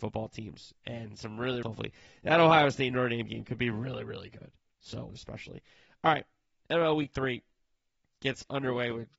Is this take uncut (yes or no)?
no